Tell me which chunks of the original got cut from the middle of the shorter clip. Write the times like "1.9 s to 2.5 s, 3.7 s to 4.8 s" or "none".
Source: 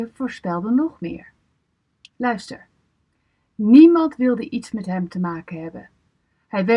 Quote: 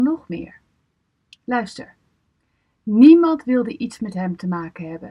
none